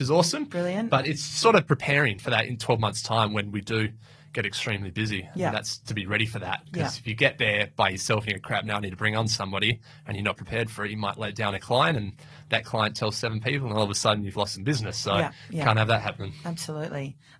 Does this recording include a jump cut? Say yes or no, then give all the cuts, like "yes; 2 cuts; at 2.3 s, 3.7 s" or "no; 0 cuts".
no; 0 cuts